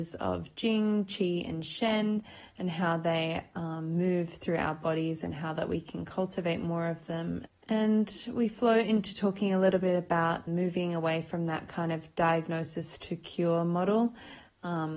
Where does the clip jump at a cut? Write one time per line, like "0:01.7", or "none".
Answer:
0:07.5
0:10.5